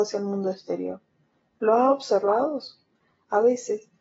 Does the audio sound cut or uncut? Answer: uncut